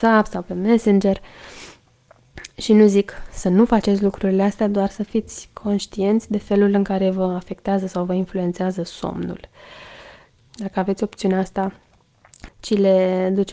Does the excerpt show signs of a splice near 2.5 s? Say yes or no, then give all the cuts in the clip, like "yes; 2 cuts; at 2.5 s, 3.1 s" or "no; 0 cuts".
no; 2 cuts; at 10.4 s, 12.5 s